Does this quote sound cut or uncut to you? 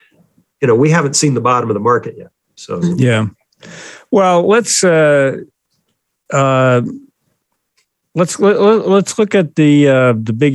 uncut